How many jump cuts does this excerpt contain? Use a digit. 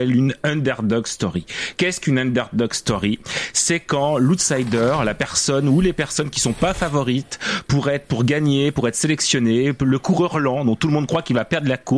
0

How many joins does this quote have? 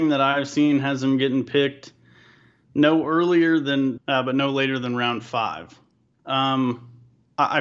2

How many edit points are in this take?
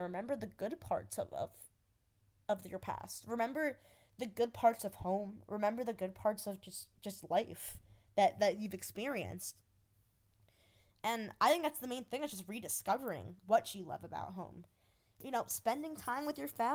1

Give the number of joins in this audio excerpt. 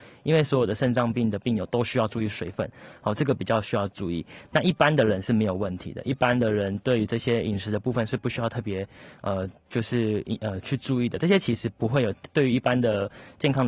0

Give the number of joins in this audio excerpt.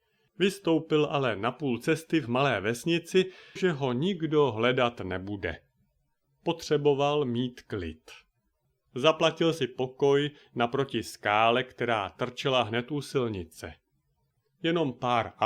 1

